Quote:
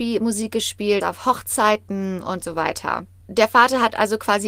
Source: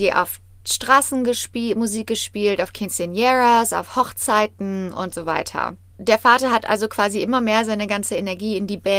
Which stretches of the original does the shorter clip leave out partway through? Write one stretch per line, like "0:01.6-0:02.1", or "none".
0:02.6-0:03.7